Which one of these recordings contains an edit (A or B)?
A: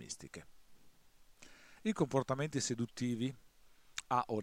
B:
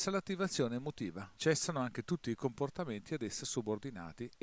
B